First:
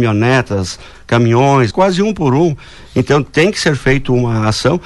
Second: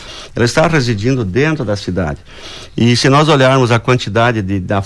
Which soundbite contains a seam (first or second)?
first